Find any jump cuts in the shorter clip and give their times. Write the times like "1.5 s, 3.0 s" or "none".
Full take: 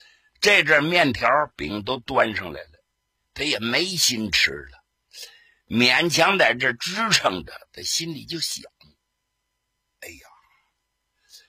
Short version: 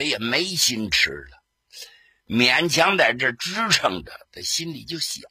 none